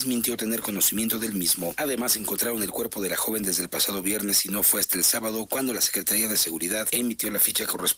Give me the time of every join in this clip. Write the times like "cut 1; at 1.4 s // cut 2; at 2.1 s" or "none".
none